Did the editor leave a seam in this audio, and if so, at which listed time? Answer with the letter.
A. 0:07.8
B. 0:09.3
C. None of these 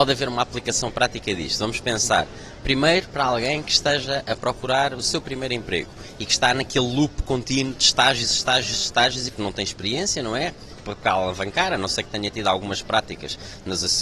B